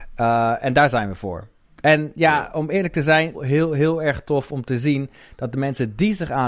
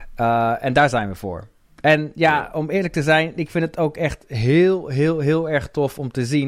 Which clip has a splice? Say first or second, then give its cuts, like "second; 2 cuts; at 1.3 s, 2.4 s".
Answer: first; 1 cut; at 3.3 s